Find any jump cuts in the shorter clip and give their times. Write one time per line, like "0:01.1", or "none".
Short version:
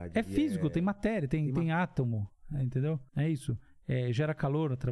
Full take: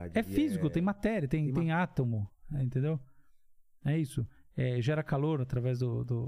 0:03.1